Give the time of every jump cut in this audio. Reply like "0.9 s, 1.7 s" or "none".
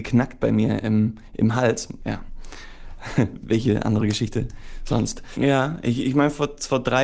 2.0 s, 5.3 s